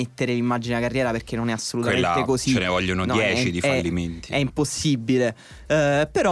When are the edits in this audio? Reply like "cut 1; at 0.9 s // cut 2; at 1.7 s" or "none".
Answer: none